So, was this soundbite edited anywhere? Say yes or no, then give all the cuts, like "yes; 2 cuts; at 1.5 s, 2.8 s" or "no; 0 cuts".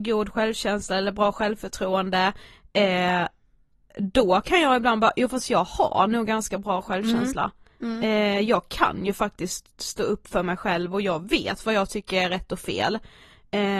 no; 0 cuts